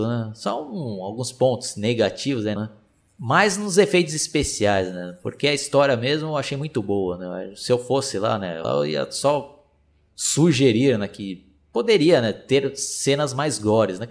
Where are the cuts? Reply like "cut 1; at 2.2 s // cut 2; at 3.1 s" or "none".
cut 1; at 2.6 s // cut 2; at 8.6 s